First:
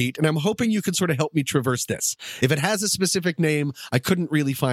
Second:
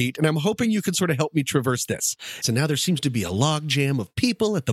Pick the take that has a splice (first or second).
second